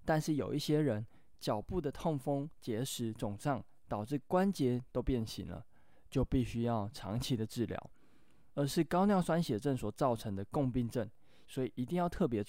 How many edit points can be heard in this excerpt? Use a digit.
2